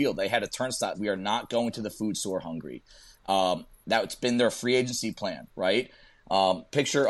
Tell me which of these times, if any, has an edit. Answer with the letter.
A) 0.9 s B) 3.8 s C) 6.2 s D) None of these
A